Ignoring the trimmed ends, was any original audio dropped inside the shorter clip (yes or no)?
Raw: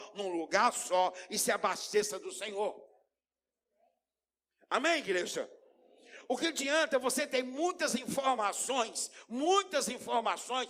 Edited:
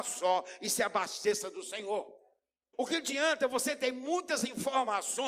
yes